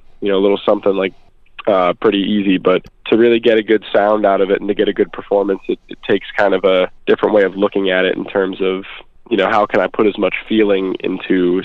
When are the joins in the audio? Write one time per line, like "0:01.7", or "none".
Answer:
none